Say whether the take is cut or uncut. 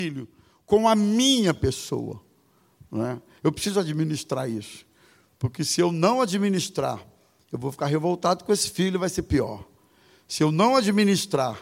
uncut